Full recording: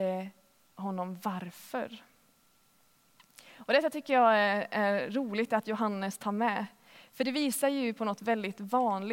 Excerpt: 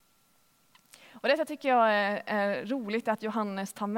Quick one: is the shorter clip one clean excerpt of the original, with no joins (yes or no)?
yes